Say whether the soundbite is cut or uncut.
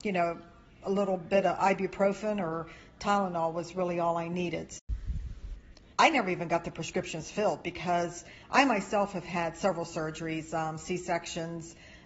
cut